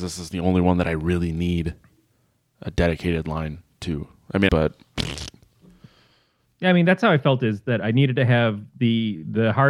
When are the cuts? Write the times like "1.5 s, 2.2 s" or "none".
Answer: 4.5 s